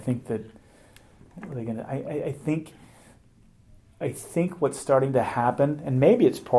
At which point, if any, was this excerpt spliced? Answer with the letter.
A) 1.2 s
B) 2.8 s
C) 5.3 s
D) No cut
A